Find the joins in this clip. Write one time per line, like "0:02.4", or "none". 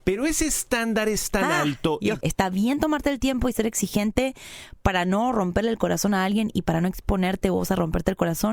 0:02.2